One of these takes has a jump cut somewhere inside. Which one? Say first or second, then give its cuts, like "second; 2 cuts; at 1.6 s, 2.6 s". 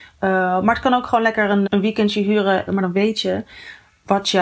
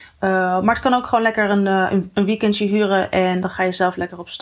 first; 2 cuts; at 1.7 s, 2.7 s